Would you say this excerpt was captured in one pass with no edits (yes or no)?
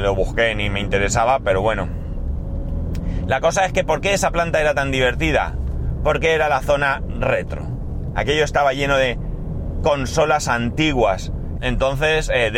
no